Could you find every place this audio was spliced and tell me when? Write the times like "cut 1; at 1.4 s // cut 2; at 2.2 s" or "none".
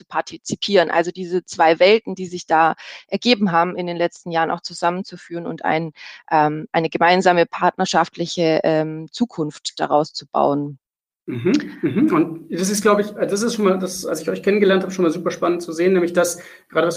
none